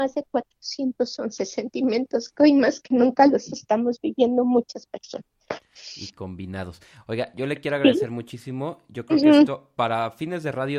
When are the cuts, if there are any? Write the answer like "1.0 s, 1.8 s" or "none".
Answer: none